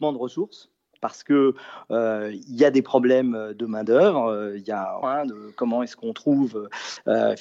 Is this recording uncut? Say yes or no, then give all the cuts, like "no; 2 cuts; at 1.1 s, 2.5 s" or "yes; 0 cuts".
no; 1 cut; at 5.0 s